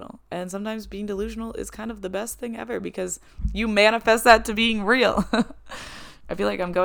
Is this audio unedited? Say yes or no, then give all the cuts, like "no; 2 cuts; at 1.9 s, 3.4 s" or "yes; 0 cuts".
yes; 0 cuts